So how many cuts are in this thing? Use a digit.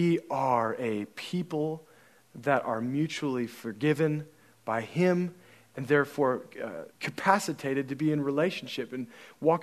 1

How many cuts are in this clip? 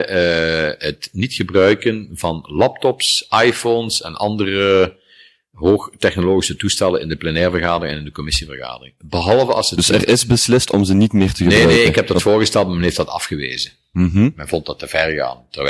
0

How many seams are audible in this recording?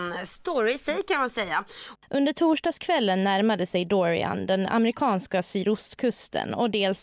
1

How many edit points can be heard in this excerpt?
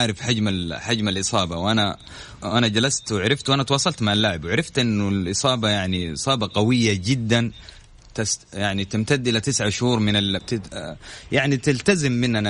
2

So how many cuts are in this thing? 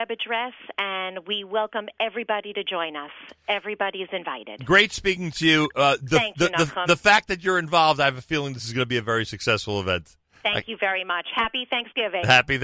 0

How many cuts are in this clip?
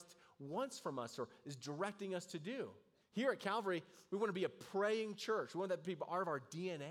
1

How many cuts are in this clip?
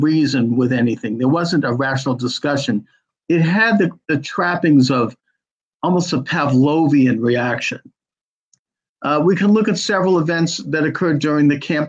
0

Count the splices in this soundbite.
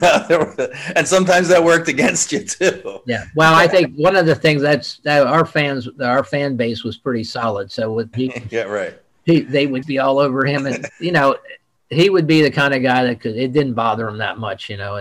3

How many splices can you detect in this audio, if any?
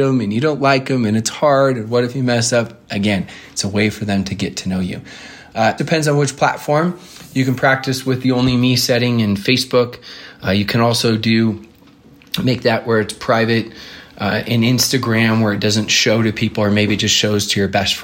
1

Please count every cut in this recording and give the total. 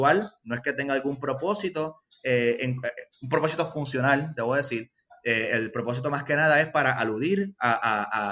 0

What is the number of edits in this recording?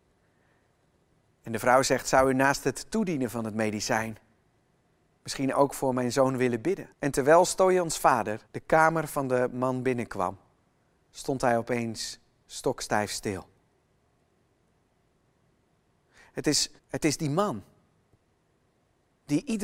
3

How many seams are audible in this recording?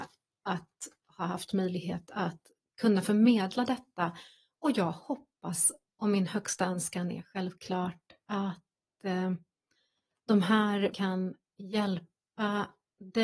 1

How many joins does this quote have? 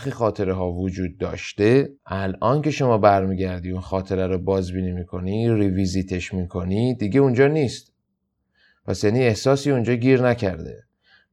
1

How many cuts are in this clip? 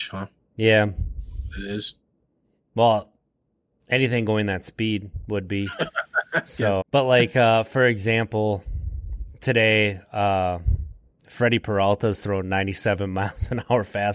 1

